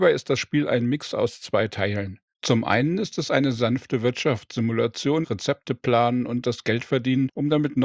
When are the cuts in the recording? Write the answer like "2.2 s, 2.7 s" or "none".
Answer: 2.3 s, 5.2 s